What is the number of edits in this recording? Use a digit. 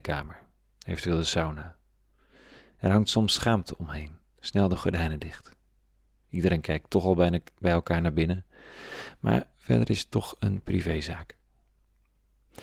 1